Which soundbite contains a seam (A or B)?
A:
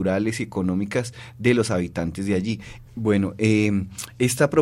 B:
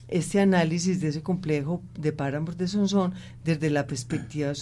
A